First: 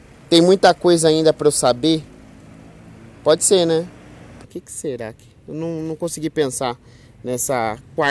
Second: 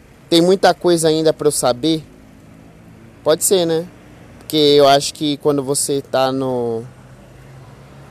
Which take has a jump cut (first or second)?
first